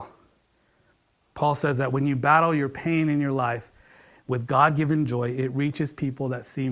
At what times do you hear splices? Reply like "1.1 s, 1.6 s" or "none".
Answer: none